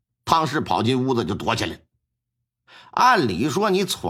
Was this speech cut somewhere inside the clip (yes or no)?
no